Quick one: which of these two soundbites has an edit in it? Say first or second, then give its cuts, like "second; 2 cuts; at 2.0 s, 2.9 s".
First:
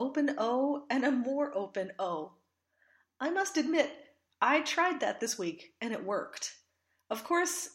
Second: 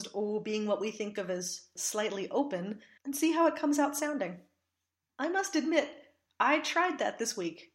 second; 2 cuts; at 3.0 s, 5.1 s